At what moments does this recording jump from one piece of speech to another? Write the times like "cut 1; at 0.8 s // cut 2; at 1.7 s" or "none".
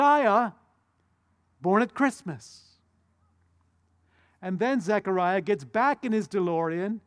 none

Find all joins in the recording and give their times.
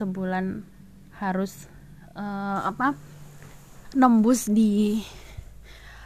none

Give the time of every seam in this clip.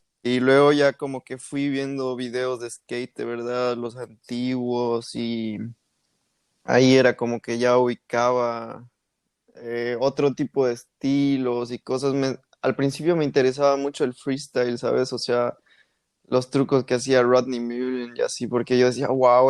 none

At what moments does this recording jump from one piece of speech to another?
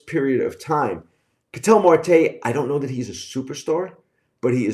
none

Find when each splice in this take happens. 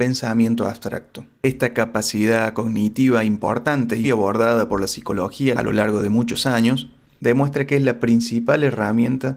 cut 1; at 4.0 s

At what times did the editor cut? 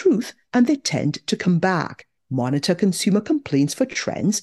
cut 1; at 2.2 s

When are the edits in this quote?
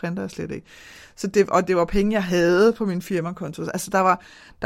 none

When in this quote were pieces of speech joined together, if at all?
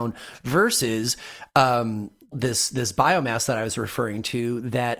cut 1; at 2.3 s

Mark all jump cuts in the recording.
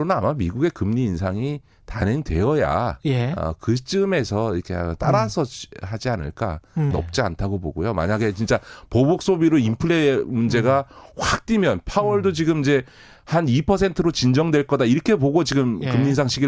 cut 1; at 6.9 s

